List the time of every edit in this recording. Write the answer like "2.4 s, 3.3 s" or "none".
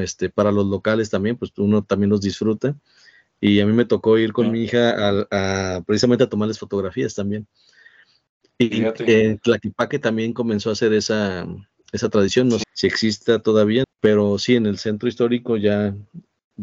12.6 s, 13.8 s